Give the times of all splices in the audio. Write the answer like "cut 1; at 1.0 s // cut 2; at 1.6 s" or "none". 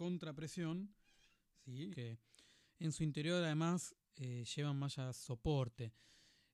cut 1; at 1.9 s